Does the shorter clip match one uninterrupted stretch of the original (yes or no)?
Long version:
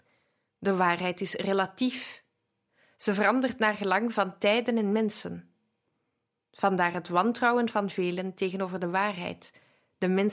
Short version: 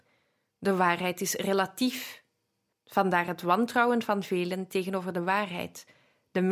no